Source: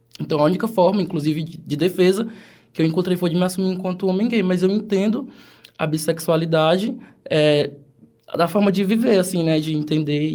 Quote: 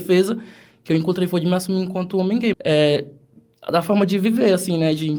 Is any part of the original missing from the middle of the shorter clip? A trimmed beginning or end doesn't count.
yes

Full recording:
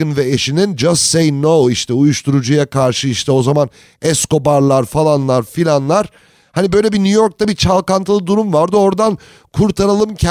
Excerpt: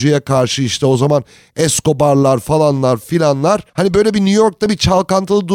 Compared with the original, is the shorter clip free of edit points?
no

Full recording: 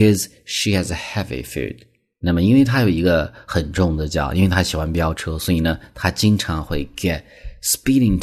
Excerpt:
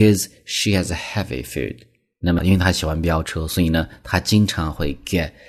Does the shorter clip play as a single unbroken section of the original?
no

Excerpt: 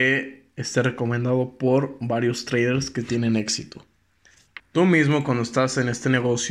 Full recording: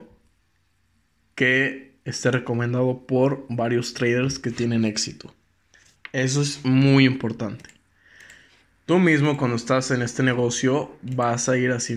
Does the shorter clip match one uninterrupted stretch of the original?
no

